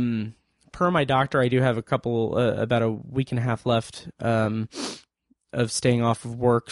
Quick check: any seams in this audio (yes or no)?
no